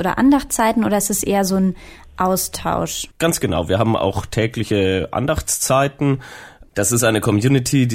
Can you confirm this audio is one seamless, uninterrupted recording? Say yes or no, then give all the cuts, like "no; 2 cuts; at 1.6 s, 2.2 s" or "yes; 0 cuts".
no; 2 cuts; at 3.1 s, 6.6 s